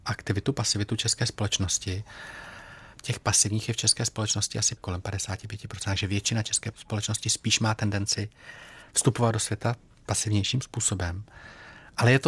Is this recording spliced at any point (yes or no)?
yes